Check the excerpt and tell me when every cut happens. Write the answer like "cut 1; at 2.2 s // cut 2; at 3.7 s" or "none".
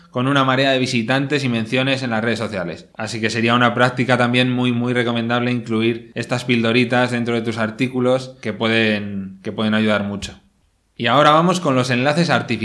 cut 1; at 2.9 s